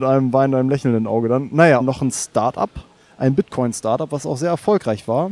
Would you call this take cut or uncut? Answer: cut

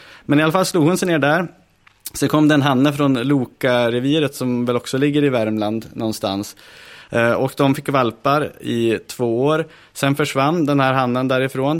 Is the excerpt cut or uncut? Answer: uncut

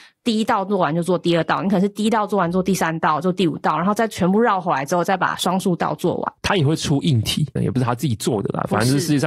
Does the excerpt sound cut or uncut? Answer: cut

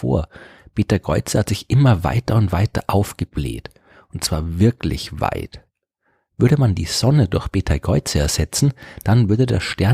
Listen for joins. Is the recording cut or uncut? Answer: uncut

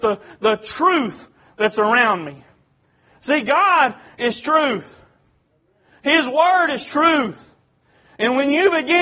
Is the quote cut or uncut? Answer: uncut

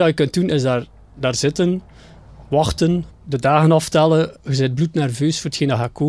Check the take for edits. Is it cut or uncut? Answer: cut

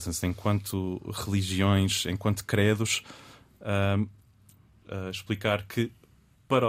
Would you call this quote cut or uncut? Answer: cut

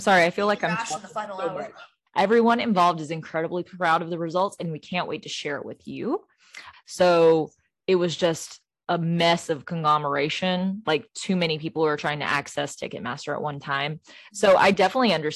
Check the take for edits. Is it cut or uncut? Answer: cut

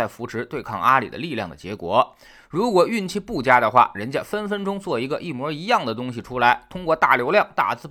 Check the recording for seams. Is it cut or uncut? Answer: uncut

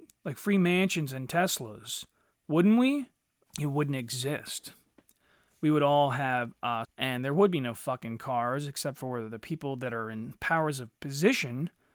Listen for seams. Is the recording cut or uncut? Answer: cut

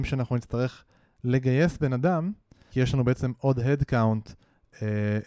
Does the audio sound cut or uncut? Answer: cut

